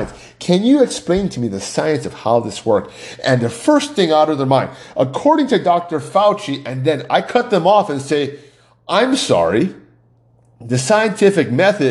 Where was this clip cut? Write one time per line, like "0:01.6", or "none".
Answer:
none